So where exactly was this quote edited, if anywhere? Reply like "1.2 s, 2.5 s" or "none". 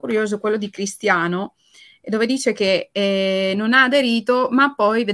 none